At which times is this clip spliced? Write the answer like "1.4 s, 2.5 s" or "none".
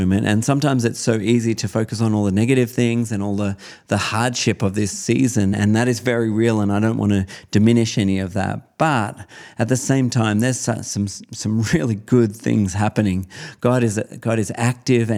none